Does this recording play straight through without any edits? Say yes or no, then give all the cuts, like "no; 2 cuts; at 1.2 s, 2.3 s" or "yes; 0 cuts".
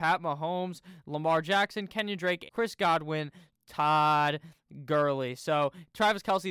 no; 1 cut; at 2.5 s